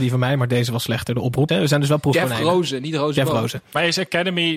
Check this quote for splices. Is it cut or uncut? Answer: cut